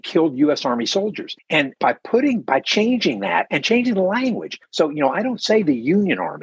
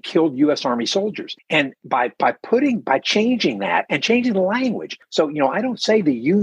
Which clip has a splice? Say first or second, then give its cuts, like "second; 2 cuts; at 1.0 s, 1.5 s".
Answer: first; 1 cut; at 1.8 s